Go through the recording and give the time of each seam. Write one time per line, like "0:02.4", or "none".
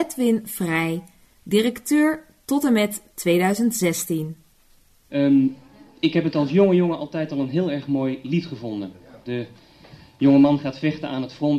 0:05.1
0:09.2